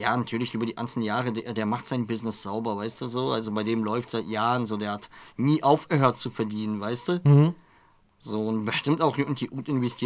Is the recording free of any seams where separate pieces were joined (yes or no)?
yes